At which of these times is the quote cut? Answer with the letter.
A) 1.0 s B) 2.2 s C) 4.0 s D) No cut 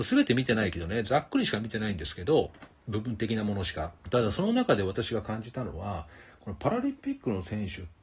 C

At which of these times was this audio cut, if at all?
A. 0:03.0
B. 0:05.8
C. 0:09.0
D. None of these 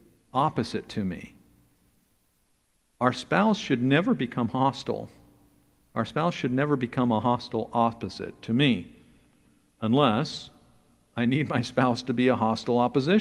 D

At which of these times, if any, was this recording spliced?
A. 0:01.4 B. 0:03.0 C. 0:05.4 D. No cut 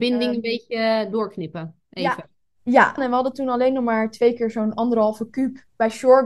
B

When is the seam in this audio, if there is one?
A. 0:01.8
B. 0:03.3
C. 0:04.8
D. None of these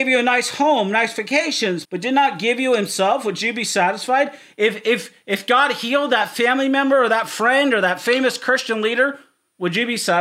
A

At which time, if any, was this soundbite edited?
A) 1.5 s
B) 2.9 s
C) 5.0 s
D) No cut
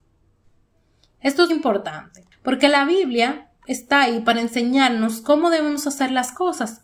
A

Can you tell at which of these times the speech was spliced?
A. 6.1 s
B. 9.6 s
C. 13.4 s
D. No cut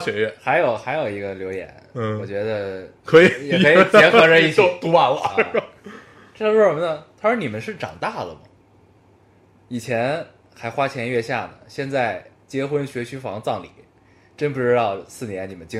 D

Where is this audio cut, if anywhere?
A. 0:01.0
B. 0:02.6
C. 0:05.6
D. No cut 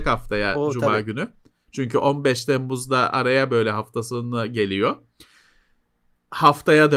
D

